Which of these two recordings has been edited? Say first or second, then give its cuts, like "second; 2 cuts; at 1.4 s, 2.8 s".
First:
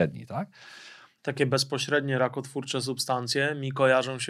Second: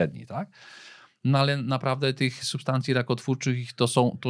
first; 1 cut; at 1.2 s